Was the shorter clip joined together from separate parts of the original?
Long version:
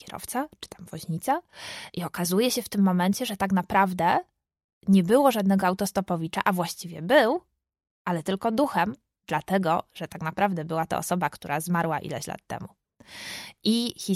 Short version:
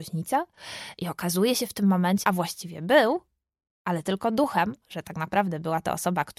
yes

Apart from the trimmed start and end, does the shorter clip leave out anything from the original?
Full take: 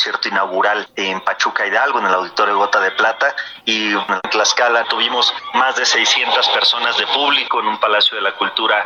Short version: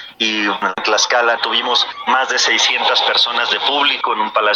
no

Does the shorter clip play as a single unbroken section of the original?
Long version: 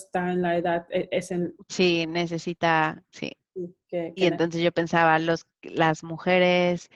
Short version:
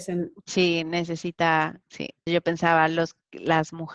no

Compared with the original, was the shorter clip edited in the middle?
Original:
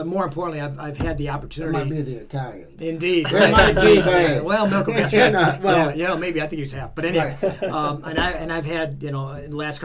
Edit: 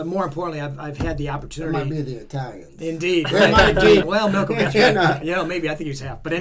yes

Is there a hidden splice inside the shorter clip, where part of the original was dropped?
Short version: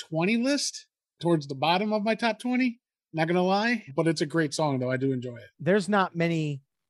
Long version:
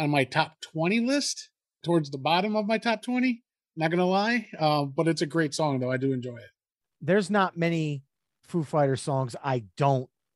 yes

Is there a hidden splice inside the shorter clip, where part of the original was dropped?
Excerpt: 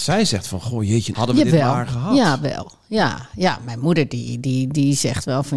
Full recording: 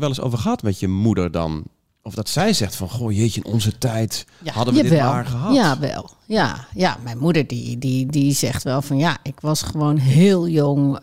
yes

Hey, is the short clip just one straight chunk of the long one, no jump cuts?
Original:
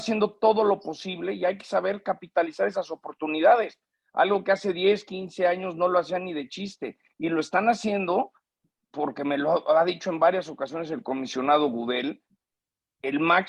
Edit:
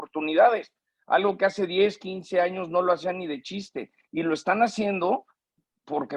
yes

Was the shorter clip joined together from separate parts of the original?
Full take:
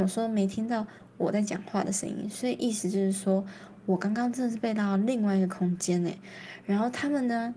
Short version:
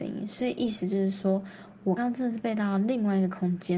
yes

